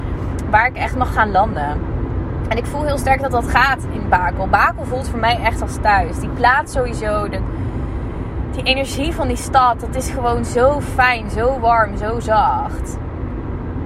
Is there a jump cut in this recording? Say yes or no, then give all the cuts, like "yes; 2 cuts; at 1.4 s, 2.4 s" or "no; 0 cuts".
no; 0 cuts